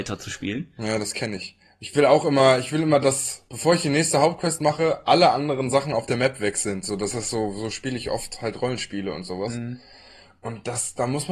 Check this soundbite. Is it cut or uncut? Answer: uncut